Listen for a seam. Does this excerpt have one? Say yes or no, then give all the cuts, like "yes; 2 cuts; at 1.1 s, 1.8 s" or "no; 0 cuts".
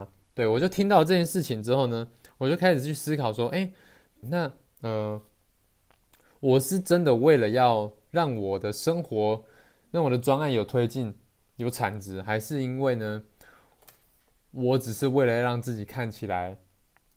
yes; 1 cut; at 4.2 s